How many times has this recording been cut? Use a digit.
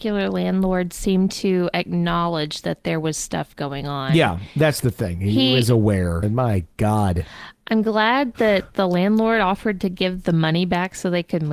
1